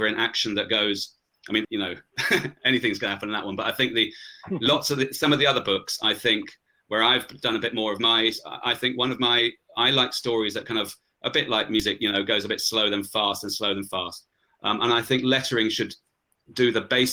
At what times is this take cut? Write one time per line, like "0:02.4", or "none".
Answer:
0:01.6